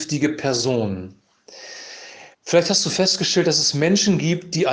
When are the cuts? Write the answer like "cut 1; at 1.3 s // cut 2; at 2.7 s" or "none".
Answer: cut 1; at 2.3 s